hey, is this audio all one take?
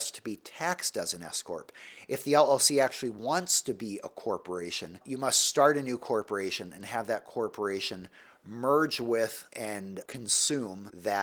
yes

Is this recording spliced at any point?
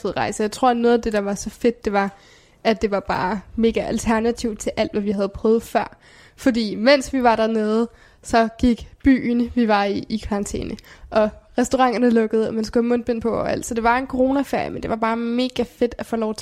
no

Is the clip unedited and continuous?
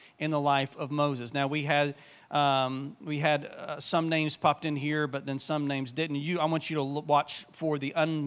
yes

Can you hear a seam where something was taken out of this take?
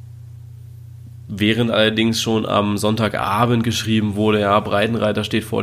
no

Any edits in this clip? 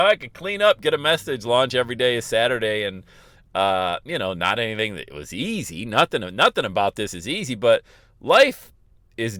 no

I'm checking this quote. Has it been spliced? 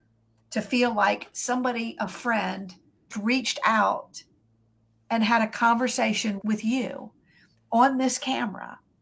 yes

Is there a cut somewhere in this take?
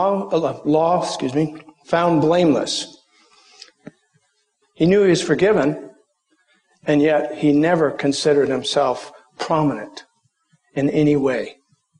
yes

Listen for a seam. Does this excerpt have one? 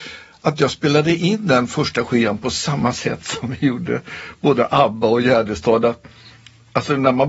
no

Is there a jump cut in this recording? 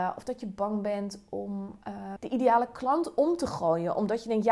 yes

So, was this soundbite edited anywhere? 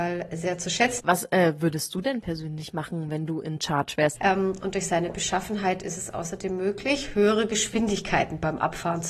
yes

